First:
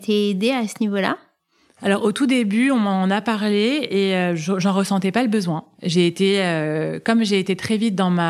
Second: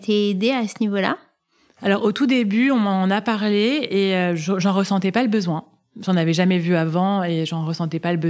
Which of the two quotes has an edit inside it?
first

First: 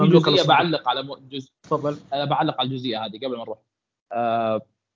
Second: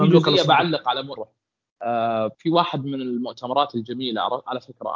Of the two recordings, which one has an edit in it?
second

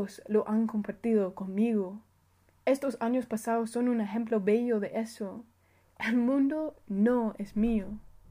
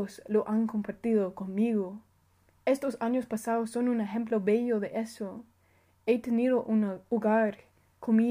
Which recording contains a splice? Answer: first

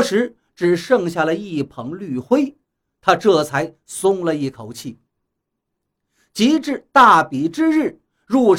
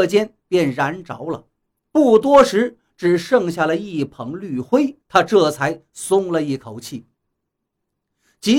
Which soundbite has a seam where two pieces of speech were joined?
second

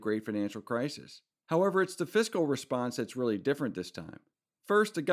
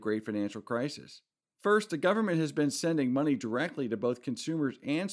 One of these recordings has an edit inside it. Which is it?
second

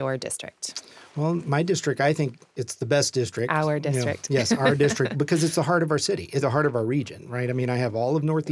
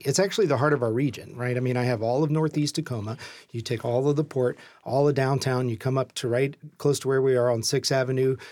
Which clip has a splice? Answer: first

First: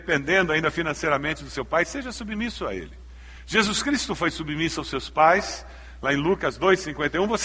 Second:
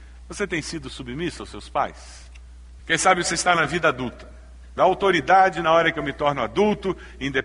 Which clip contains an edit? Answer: second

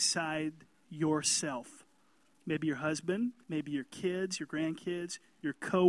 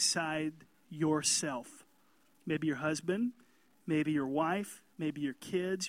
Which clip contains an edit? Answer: first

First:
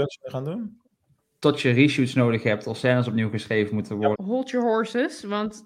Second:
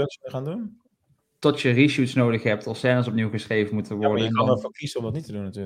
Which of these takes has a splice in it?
first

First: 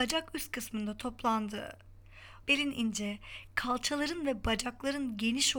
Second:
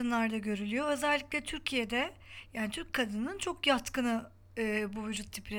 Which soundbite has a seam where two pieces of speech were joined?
first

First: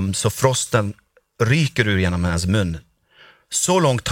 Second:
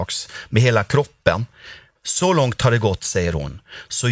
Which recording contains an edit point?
second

